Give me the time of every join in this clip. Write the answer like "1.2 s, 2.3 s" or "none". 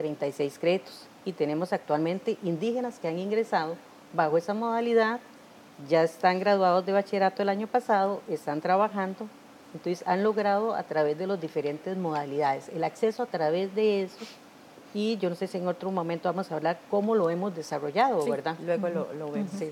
none